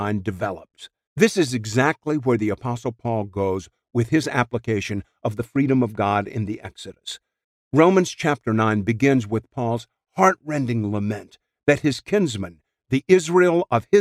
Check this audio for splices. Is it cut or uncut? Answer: cut